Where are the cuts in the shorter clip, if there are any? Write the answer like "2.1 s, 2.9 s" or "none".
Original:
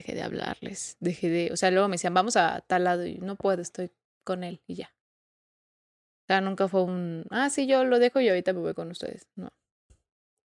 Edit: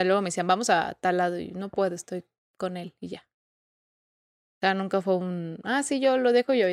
none